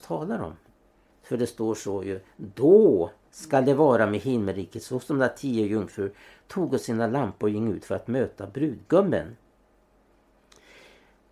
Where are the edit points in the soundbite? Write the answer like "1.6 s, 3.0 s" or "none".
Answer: 1.1 s